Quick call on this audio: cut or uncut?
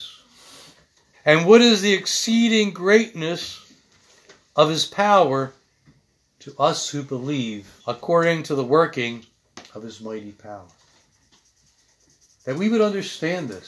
cut